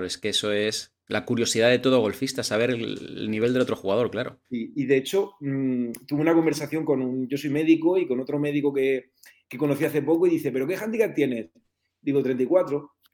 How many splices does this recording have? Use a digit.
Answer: 1